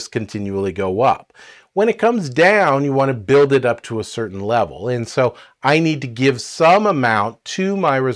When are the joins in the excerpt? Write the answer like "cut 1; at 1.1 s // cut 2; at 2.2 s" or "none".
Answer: none